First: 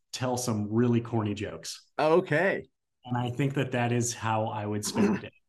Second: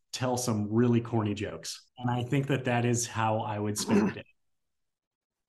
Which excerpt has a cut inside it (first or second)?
second